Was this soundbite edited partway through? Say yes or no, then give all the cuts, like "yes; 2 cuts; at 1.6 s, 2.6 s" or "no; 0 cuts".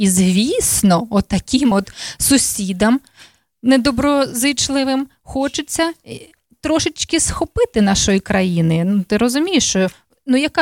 no; 0 cuts